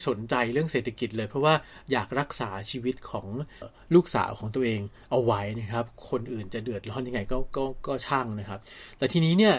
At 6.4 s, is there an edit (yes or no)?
no